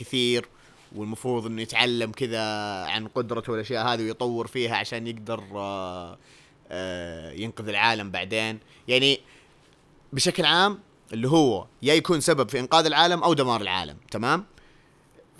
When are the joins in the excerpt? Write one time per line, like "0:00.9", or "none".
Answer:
none